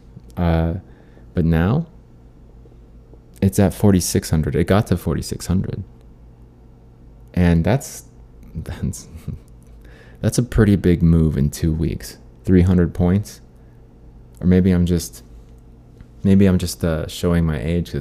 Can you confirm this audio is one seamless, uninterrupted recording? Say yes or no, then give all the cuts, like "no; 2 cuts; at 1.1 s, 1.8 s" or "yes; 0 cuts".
yes; 0 cuts